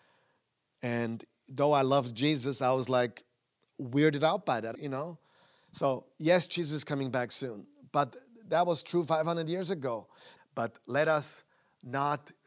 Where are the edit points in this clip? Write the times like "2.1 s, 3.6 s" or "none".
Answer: 4.7 s, 10.4 s